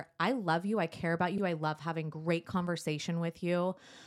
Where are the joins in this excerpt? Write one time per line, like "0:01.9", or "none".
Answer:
0:01.4